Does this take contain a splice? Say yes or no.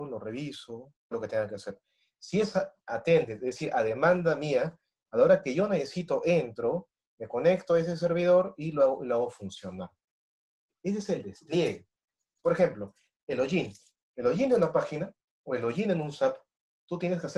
yes